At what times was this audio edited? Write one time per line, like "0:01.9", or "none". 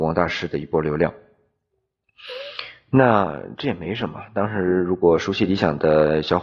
none